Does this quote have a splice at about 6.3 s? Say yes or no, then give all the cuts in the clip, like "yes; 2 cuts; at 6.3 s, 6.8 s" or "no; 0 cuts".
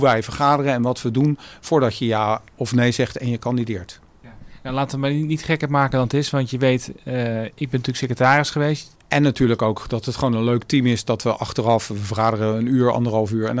no; 1 cut; at 8.9 s